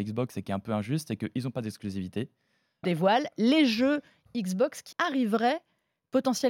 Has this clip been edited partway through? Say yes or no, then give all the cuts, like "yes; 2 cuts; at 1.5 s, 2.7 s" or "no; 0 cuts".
yes; 2 cuts; at 2.8 s, 4.9 s